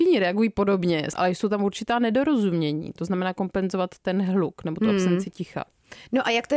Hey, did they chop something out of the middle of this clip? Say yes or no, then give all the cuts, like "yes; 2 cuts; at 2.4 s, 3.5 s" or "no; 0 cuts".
yes; 1 cut; at 1.1 s